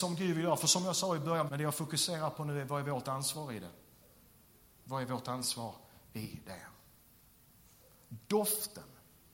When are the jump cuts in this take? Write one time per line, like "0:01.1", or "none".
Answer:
0:01.5

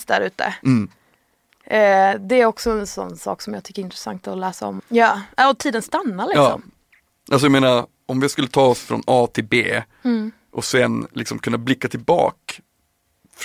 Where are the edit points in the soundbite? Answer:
0:04.8

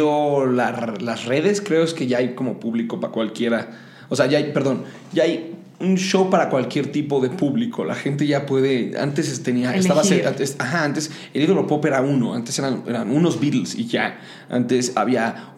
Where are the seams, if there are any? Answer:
none

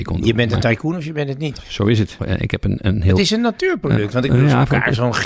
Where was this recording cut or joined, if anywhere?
0:02.2

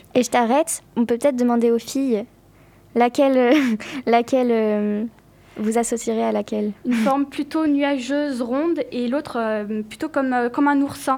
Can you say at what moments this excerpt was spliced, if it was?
none

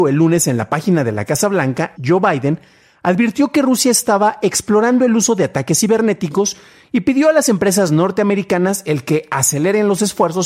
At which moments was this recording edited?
0:02.0

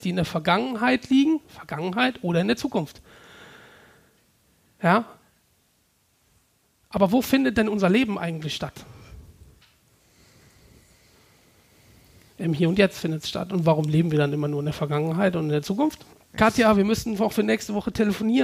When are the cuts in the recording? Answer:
0:16.3

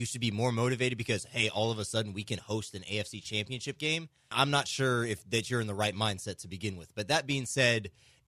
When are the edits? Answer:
0:04.3

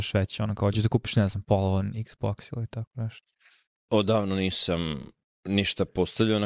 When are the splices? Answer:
none

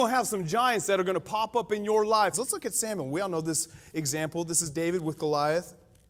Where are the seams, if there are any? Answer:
0:02.3

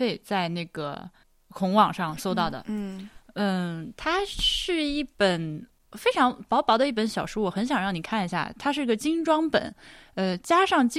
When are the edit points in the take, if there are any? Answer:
0:02.2

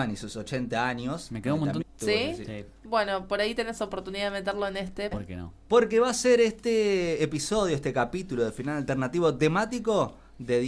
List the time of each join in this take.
0:01.8
0:05.1

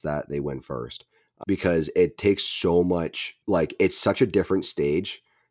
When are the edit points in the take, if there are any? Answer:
0:01.4
0:03.4

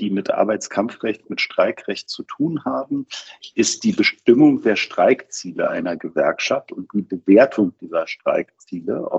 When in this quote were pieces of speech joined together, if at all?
none

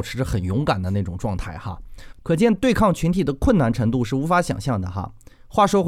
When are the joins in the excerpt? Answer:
0:02.1

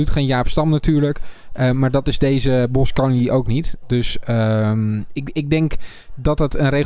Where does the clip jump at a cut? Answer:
none

